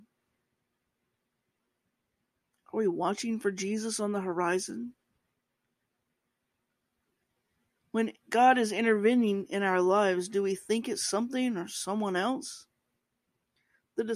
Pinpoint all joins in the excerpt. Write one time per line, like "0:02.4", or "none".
none